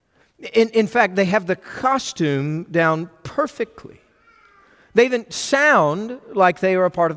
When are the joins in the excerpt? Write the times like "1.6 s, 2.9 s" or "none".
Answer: none